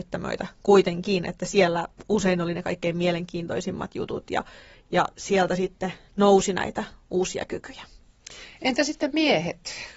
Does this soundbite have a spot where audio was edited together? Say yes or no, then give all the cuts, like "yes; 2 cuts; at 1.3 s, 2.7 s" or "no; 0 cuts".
no; 0 cuts